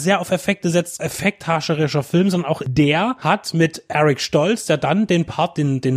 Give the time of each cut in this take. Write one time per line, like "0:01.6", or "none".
0:01.0